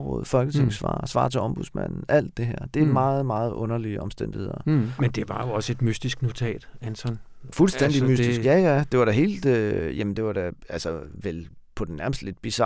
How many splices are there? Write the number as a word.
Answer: two